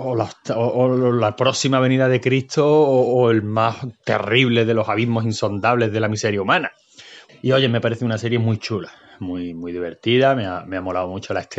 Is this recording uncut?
no; 1 cut; at 7.3 s

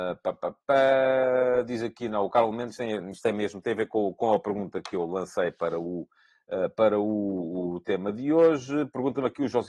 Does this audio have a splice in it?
no; 0 cuts

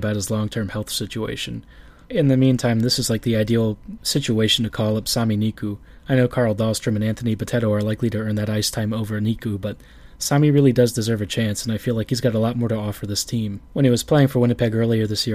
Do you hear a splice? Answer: yes; 1 cut; at 2.1 s

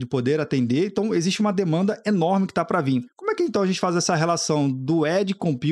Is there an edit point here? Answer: no; 0 cuts

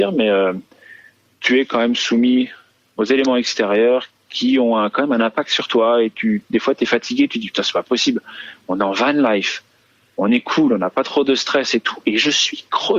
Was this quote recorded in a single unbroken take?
yes; 0 cuts

